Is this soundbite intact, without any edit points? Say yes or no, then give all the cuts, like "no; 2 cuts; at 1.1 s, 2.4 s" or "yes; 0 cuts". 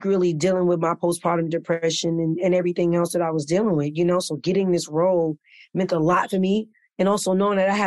yes; 0 cuts